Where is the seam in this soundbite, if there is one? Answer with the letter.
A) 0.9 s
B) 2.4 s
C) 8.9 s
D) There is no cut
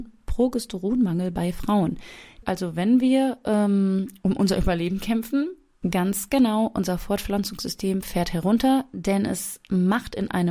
B